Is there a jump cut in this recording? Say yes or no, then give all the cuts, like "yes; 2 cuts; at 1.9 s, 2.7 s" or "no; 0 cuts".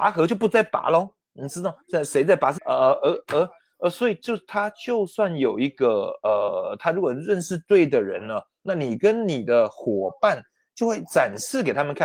yes; 1 cut; at 2.6 s